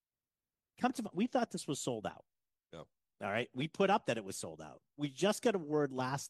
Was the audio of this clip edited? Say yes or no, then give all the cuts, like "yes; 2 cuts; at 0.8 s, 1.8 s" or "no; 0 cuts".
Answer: no; 0 cuts